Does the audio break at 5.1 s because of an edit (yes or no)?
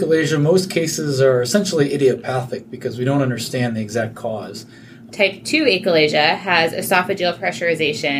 yes